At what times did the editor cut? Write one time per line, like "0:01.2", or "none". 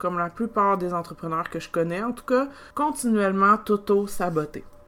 0:02.7